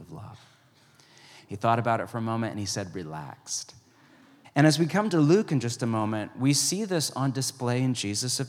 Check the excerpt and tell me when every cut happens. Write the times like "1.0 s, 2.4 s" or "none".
1.4 s, 4.4 s